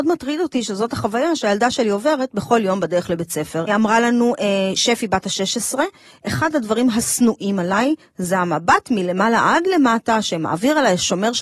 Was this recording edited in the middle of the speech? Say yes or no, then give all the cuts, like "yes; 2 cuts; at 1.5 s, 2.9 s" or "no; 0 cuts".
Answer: yes; 1 cut; at 3.7 s